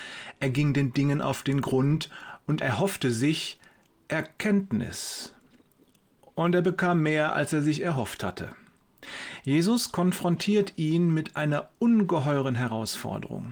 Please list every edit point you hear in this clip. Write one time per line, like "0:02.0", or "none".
0:02.6

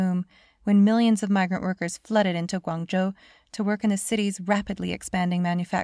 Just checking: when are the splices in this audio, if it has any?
none

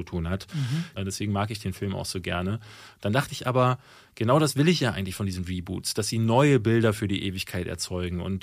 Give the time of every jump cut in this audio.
0:01.0

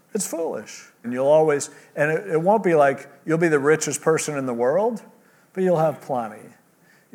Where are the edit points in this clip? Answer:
0:01.0

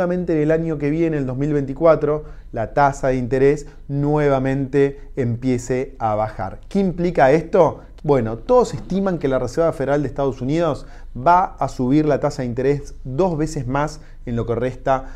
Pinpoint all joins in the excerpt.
0:08.0

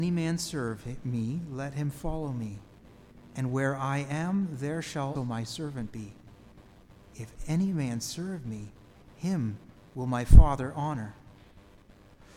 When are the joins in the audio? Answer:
0:05.2

